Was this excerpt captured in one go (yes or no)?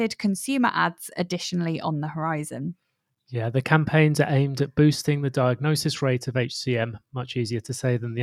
yes